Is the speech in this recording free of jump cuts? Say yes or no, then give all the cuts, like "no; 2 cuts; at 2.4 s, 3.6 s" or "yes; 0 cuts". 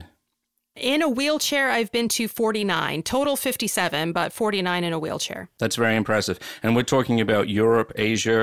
yes; 0 cuts